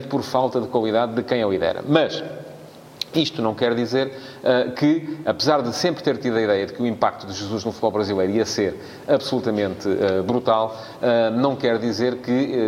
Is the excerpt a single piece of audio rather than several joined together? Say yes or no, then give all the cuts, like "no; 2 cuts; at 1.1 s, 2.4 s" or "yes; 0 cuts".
yes; 0 cuts